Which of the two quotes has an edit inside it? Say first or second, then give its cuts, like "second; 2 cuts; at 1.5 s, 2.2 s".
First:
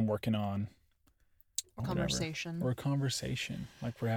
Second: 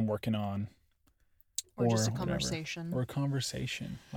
first; 1 cut; at 1.8 s